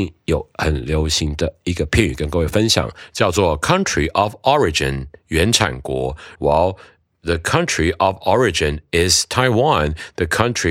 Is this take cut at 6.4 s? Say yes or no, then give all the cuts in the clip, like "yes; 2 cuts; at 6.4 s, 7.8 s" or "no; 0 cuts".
yes; 1 cut; at 6.4 s